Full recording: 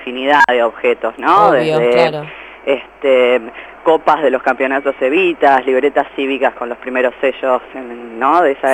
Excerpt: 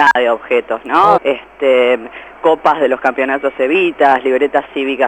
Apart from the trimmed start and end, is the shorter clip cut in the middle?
yes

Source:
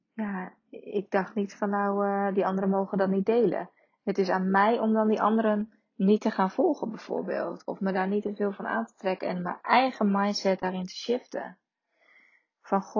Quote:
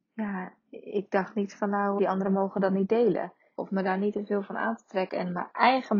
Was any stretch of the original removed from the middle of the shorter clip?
yes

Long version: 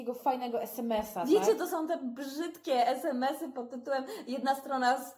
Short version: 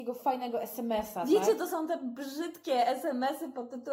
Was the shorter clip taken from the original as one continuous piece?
yes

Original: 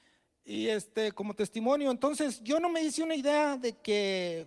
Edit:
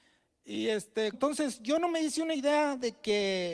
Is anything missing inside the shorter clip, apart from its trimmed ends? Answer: yes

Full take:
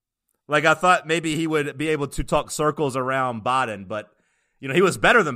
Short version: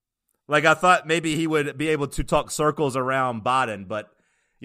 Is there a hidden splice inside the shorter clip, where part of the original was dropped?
no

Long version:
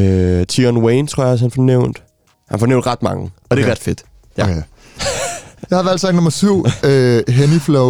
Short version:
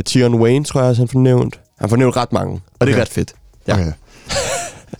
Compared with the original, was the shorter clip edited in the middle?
yes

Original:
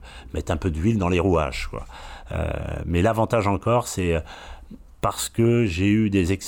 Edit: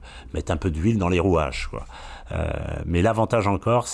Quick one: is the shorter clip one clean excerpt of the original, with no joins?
yes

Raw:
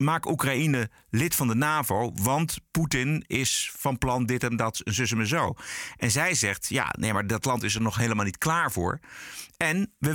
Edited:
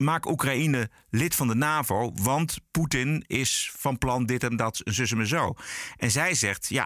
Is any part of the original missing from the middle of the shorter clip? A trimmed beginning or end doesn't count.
no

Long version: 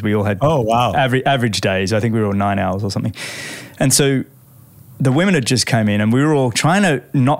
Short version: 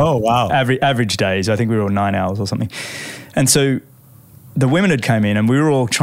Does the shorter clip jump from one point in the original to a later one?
yes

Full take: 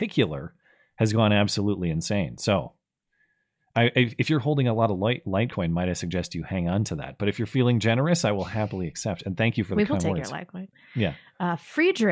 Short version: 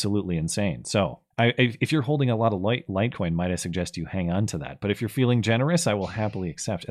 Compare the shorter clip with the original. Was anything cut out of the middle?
yes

